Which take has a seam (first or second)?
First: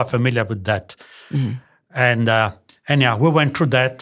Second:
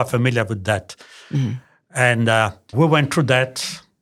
second